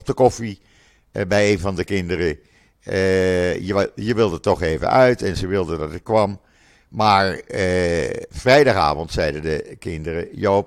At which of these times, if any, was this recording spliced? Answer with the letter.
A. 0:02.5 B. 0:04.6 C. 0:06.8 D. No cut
D